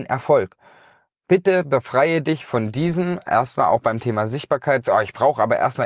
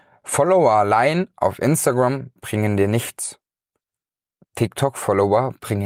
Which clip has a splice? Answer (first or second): first